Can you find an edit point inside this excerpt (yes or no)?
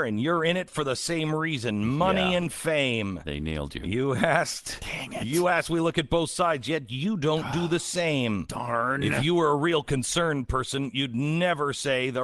no